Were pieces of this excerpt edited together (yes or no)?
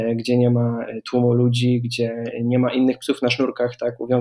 no